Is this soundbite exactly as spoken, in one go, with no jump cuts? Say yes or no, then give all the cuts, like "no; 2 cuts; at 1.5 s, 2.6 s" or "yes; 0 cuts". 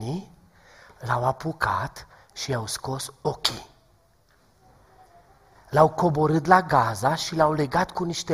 yes; 0 cuts